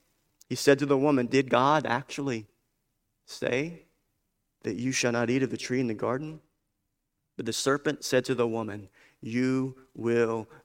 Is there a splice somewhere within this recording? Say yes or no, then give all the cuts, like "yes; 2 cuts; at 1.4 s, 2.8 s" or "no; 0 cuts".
no; 0 cuts